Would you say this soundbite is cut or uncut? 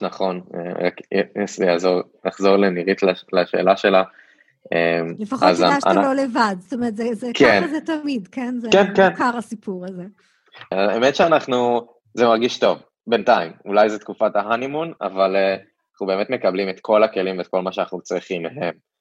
cut